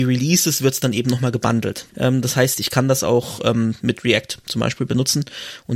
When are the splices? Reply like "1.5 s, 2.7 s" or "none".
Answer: 1.9 s

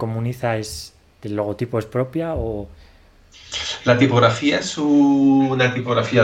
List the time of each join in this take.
none

